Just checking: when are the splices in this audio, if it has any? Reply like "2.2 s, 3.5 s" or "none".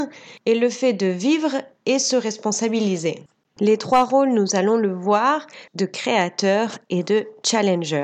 5.7 s